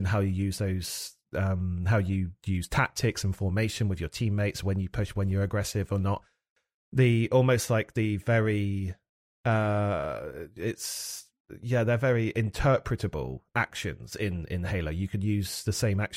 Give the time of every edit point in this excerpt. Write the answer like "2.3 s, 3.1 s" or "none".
none